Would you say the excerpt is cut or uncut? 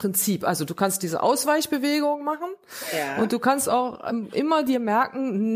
uncut